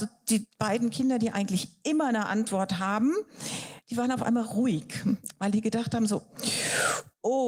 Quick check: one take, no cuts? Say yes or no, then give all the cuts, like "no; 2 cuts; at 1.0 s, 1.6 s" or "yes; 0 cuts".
yes; 0 cuts